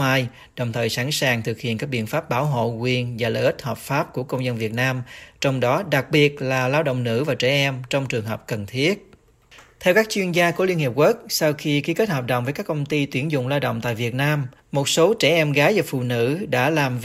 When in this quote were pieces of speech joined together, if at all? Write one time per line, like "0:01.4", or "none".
none